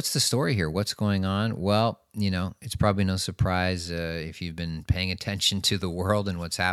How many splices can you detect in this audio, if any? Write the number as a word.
zero